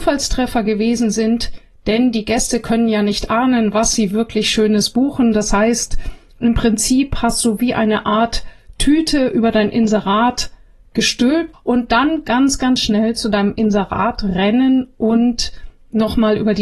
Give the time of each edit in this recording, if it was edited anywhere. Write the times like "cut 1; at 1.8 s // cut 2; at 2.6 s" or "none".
cut 1; at 11.5 s